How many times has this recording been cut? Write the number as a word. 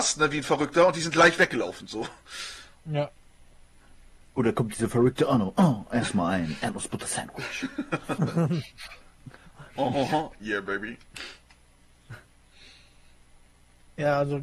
one